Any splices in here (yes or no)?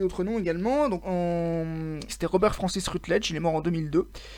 yes